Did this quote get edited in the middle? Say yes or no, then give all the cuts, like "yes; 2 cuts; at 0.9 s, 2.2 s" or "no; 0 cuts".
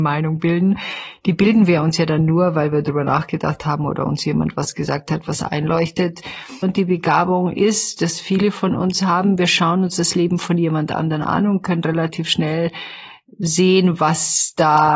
yes; 1 cut; at 6.6 s